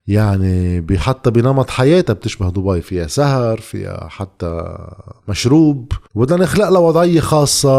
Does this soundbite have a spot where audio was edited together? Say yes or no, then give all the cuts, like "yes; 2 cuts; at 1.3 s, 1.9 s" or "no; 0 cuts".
yes; 1 cut; at 6.0 s